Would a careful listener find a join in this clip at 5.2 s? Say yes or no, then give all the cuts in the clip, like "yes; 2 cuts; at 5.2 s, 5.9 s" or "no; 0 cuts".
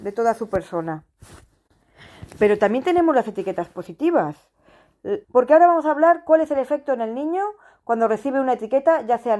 yes; 1 cut; at 5.2 s